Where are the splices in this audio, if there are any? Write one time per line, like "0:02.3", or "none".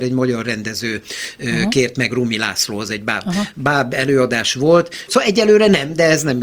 0:05.1